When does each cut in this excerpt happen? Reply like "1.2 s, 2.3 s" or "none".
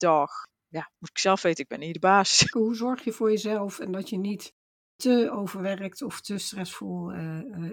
2.5 s

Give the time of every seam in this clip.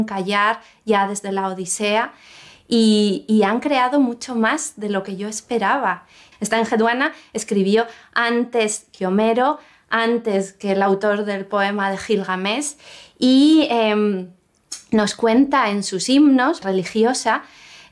6.3 s, 16.6 s

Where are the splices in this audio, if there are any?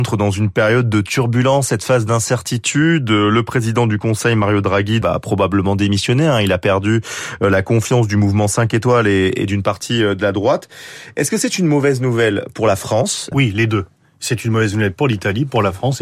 5.0 s, 13.3 s

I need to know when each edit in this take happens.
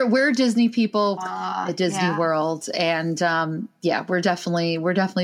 1.2 s

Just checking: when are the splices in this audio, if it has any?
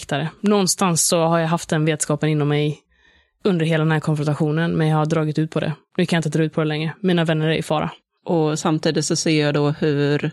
8.2 s

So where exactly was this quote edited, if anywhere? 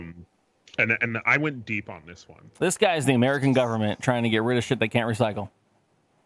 none

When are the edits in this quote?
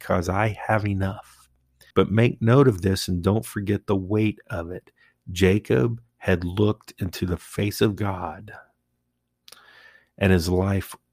1.9 s

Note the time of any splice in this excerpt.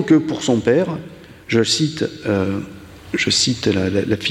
none

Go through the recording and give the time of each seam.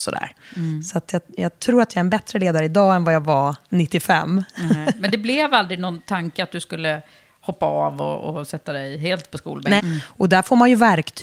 9.8 s

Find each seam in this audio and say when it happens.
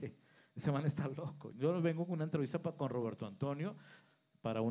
1.5 s

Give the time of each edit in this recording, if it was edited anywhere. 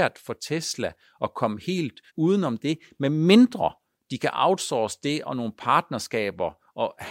2.1 s

